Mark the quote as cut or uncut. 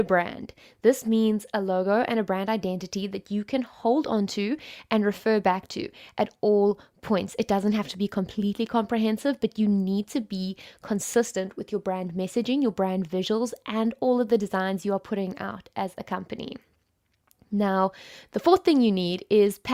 uncut